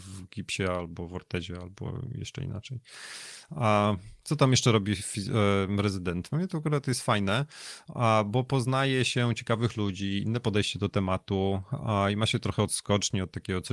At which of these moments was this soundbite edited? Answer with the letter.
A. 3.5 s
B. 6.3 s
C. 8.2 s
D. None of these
B